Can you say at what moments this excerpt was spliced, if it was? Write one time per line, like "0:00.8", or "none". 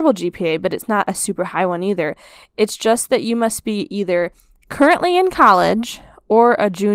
none